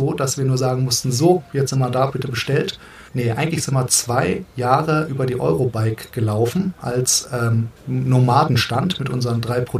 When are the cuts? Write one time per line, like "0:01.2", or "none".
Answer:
0:03.1
0:07.8